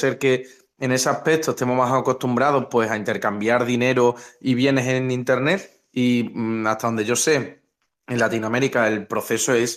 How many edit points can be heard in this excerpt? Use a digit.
0